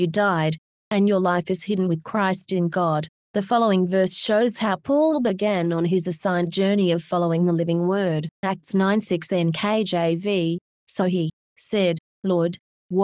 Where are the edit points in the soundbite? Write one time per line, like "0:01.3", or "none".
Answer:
0:08.4
0:11.5